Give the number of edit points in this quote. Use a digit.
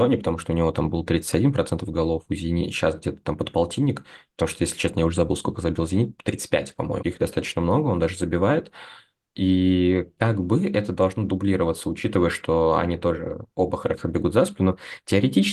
1